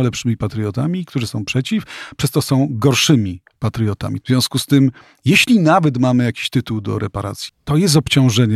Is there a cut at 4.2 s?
yes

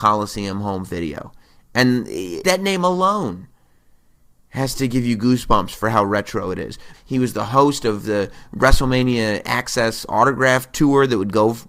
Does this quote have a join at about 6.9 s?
yes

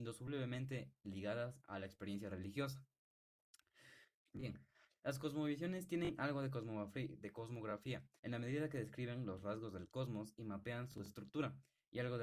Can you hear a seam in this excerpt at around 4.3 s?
yes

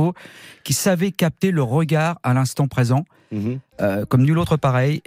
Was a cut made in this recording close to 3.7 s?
no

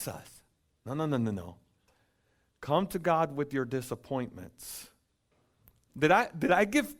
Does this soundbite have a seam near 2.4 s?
no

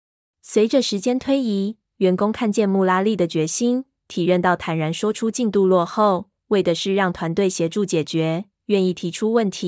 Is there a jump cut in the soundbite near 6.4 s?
no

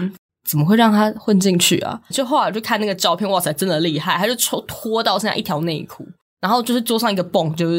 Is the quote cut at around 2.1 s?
yes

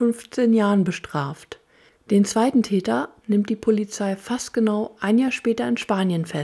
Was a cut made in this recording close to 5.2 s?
no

